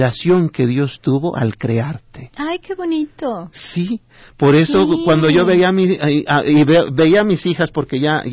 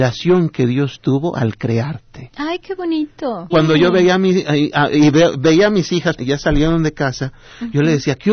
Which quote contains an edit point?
second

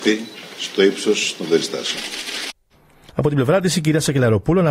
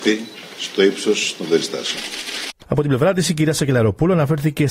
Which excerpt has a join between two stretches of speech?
second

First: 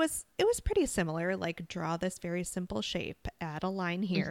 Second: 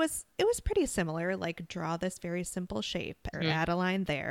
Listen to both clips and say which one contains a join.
second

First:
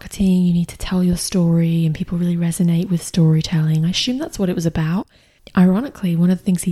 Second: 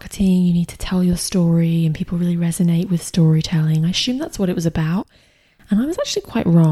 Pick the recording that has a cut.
first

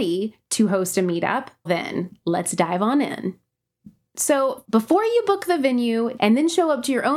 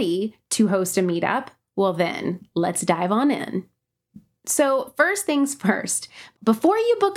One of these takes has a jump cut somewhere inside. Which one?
first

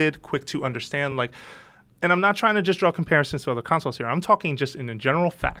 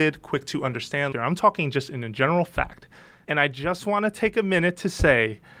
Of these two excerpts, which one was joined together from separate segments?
second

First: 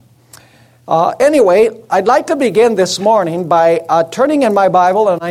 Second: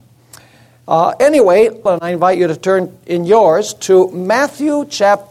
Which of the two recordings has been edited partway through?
second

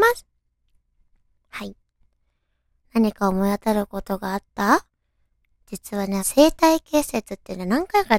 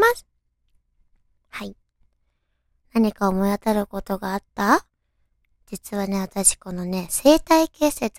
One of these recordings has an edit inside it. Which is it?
first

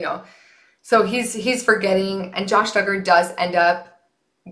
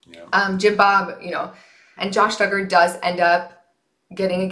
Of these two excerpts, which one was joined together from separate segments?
second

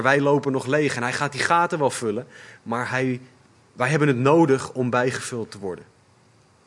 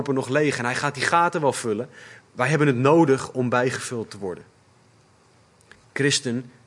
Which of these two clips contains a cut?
second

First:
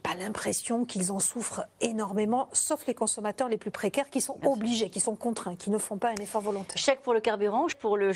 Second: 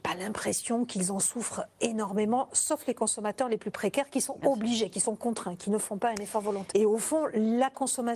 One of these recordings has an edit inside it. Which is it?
second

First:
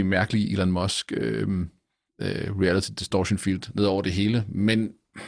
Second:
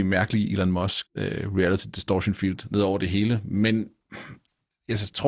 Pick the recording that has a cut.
second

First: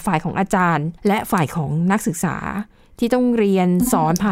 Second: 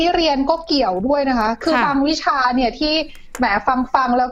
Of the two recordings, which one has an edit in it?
first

